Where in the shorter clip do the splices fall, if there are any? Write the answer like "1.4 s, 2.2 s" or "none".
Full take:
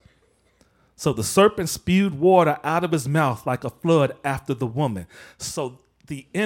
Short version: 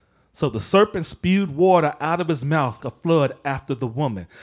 2.8 s